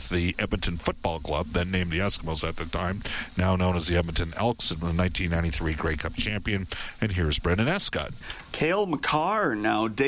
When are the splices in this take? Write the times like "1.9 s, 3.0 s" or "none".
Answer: none